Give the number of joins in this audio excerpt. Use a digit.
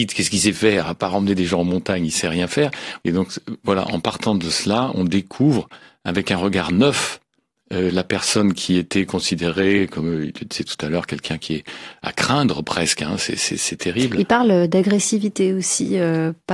1